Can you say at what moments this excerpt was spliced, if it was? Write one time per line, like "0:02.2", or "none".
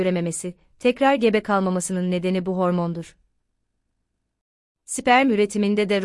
0:04.6